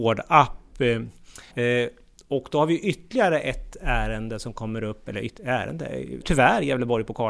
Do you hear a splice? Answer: yes; 2 cuts; at 1.5 s, 6.2 s

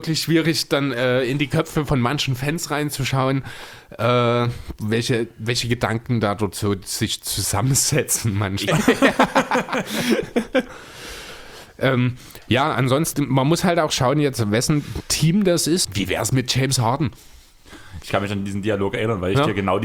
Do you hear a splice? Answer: yes; 3 cuts; at 8.7 s, 13.1 s, 15.8 s

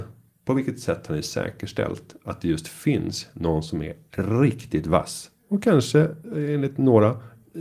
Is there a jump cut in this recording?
no; 0 cuts

